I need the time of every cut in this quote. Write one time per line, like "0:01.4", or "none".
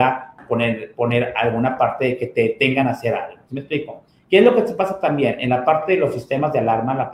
none